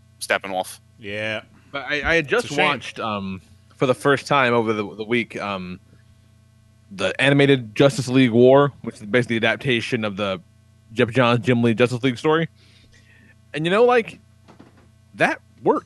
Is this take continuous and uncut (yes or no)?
yes